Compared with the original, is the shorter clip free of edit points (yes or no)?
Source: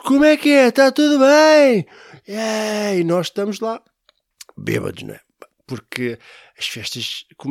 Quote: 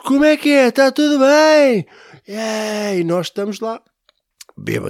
yes